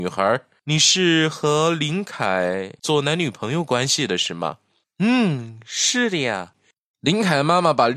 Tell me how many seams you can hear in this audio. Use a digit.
1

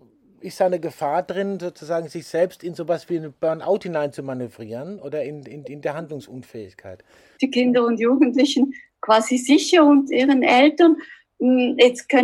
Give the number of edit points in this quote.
1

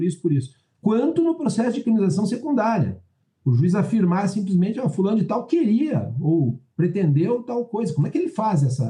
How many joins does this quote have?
0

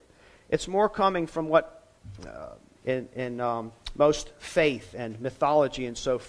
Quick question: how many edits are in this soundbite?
1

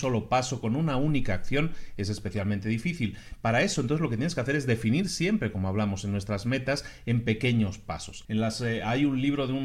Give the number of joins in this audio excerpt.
1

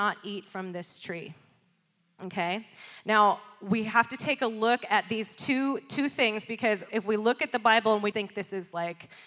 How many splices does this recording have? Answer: 2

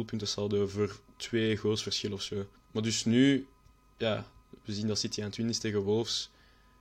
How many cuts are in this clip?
1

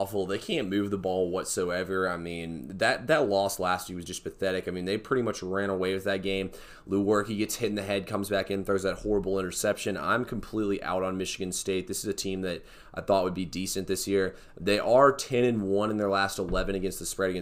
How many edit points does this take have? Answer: 0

